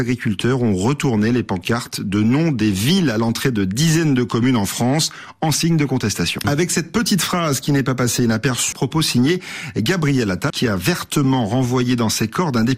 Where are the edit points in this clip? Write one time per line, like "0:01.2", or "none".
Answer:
0:06.4
0:08.7
0:10.5